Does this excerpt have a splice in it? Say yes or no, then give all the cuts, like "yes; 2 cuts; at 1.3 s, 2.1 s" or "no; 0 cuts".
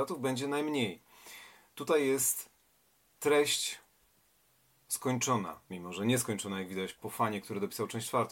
yes; 2 cuts; at 5.6 s, 6.9 s